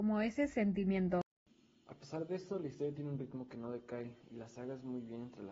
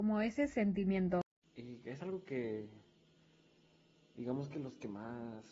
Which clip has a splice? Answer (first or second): second